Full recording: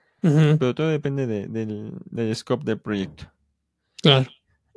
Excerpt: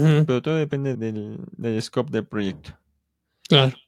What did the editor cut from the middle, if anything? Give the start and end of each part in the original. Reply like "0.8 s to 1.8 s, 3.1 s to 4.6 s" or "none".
1.3 s to 1.5 s